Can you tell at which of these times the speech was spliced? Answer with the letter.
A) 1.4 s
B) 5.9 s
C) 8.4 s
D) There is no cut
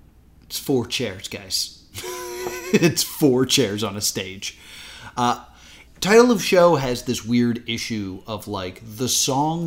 B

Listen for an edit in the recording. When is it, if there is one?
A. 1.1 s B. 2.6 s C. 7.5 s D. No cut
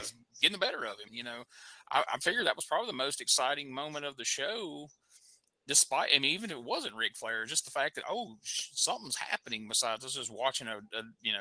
A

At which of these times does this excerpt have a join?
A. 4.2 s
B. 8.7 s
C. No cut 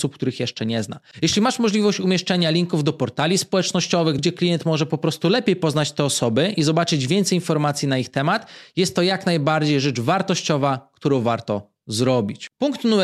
A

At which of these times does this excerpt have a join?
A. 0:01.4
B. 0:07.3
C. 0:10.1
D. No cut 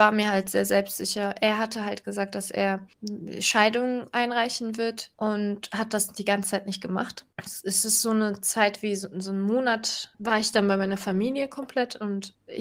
B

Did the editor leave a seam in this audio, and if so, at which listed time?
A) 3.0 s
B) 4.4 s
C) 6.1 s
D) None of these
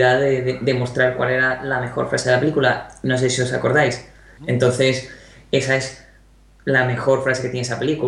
B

